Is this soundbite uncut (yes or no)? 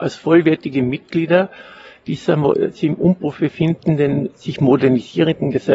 yes